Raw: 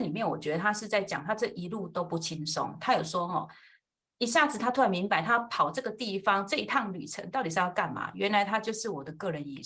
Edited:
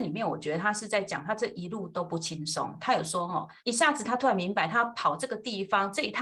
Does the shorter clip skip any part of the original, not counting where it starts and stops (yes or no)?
yes